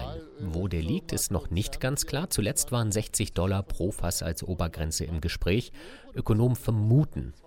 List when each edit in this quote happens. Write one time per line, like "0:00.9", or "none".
none